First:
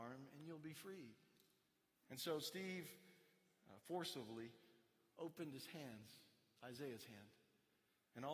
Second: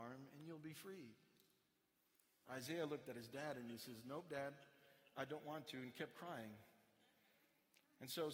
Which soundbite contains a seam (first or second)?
first